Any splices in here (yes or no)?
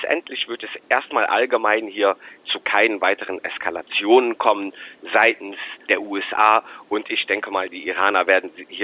no